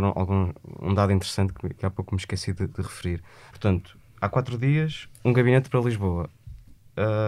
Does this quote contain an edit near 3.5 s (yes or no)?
yes